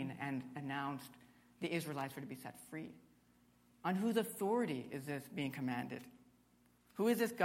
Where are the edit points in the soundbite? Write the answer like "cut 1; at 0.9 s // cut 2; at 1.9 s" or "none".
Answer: none